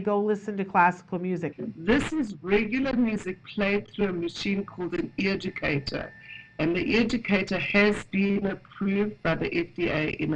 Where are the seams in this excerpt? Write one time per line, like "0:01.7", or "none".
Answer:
0:01.5